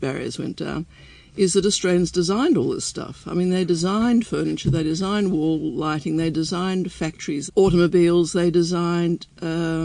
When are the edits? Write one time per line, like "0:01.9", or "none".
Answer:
0:07.5